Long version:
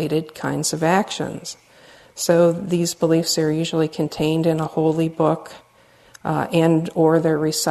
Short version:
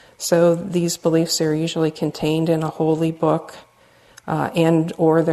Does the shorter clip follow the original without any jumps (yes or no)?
yes